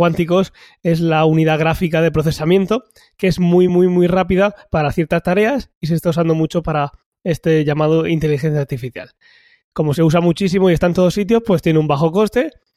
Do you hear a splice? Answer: no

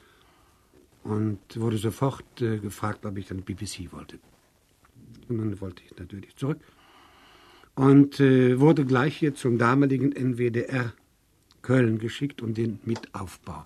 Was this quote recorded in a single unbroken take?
no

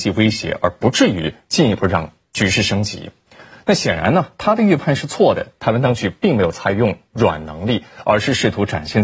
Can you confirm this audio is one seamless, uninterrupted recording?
yes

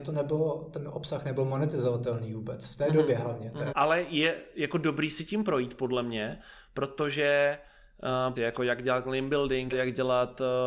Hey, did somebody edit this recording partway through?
yes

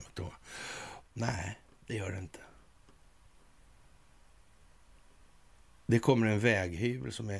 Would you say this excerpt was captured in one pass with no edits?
no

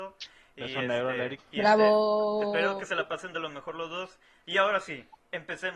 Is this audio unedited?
no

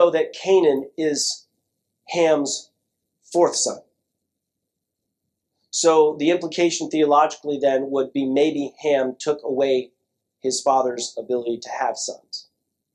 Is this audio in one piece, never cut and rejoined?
yes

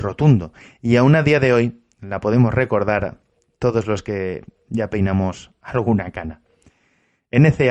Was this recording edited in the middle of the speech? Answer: no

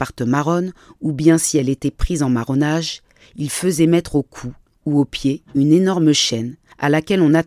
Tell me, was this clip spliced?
no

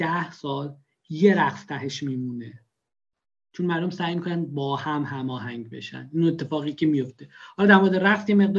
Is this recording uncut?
yes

